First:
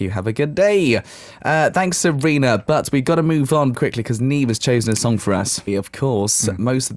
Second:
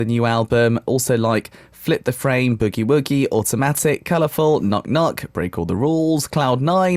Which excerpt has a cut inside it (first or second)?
first